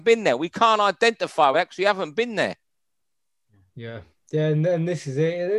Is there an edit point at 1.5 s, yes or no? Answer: no